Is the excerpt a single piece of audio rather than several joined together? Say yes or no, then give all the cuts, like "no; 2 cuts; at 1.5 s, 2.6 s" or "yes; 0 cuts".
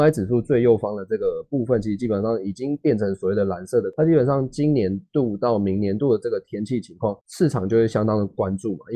no; 1 cut; at 7.2 s